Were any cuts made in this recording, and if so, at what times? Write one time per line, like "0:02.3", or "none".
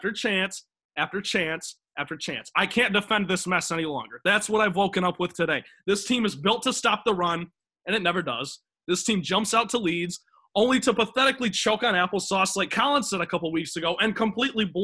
none